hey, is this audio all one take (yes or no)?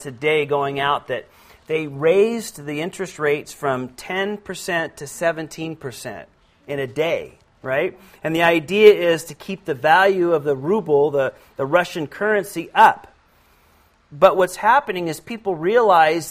yes